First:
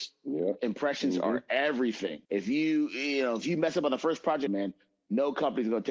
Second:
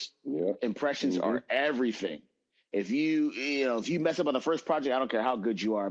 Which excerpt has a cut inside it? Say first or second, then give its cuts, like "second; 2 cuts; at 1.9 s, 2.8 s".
first; 2 cuts; at 2.2 s, 4.5 s